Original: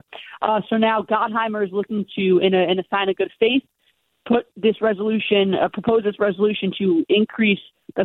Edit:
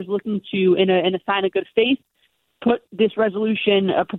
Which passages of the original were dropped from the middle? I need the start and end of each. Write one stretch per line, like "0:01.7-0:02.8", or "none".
none